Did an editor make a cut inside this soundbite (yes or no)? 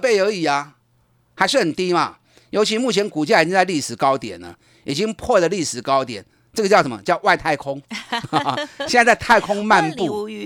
no